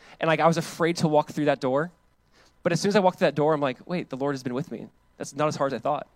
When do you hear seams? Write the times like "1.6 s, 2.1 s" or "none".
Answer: none